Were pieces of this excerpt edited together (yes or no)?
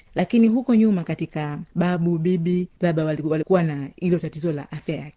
yes